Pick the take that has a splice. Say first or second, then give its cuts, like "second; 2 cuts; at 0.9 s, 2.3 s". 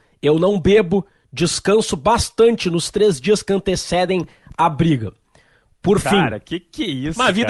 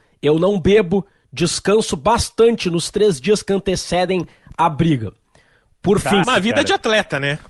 second; 1 cut; at 6.2 s